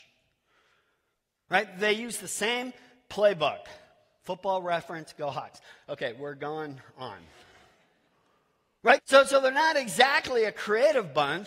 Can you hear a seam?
yes; 1 cut; at 9.0 s

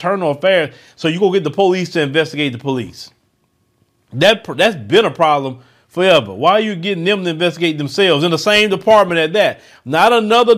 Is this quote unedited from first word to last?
yes; 0 cuts

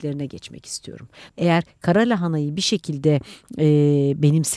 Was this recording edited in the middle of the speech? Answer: yes; 1 cut; at 1.3 s

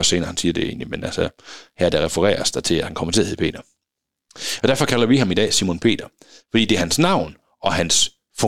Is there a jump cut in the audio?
no; 0 cuts

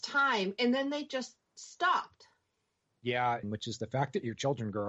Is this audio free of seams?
no; 1 cut; at 3.4 s

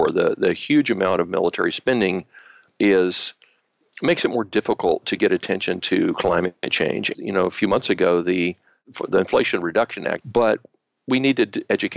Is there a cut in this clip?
yes; 2 cuts; at 7.1 s, 10.2 s

